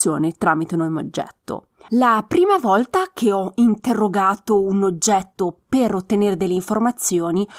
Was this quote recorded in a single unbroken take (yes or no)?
no